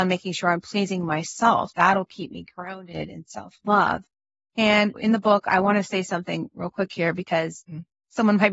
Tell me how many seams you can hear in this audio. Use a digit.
1